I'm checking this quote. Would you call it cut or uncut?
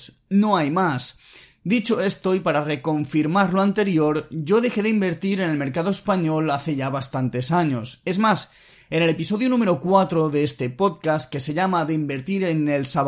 uncut